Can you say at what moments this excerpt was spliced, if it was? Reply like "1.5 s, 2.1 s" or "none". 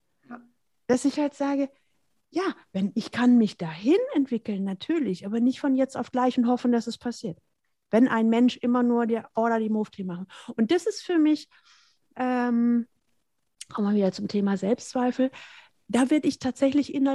none